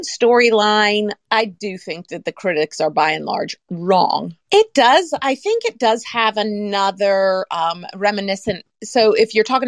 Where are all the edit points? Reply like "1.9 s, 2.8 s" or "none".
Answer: 1.3 s, 4.5 s